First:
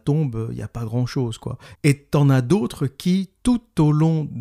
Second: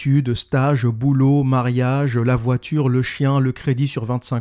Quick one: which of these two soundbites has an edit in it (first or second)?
first